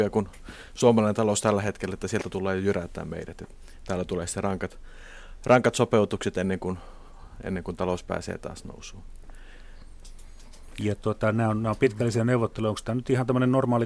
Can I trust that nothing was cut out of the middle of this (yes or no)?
yes